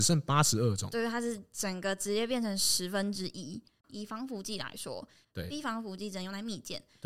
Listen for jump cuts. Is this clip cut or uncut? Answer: cut